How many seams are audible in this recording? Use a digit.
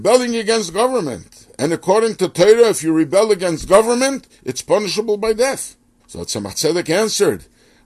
0